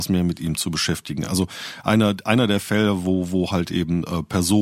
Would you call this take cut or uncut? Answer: uncut